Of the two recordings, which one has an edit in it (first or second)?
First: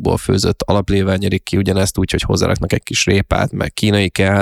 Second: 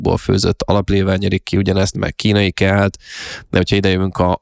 second